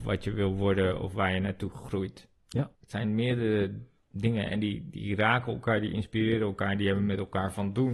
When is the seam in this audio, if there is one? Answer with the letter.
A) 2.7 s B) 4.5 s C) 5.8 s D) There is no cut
A